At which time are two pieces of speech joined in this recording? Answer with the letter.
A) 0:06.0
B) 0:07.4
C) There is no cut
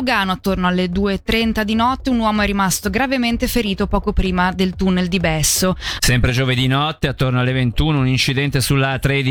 A